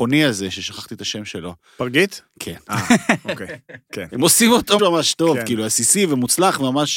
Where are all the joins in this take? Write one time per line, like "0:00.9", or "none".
0:04.8

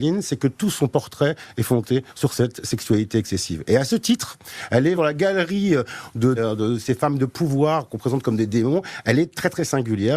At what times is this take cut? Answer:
0:05.0
0:06.4

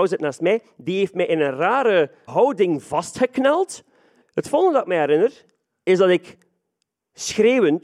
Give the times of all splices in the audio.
0:02.3
0:04.2

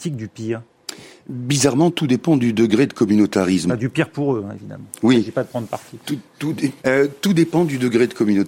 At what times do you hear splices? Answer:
0:06.8

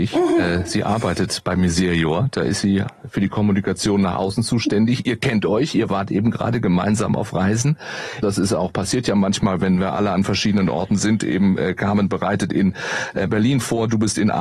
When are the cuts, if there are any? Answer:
0:08.2

